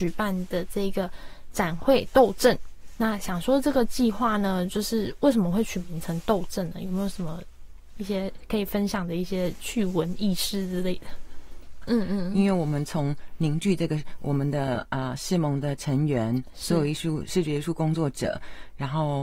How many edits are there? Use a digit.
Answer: 1